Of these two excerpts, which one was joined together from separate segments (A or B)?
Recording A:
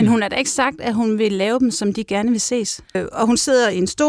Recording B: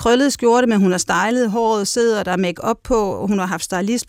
A